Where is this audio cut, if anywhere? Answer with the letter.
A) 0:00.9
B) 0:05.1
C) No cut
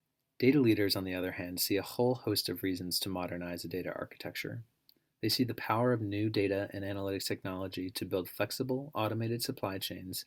C